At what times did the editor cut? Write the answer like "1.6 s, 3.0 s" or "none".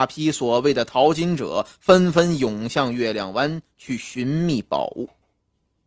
none